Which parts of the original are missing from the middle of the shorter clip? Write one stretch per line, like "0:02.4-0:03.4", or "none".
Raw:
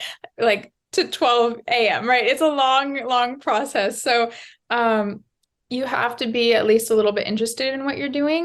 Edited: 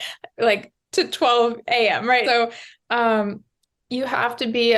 0:02.2-0:04.0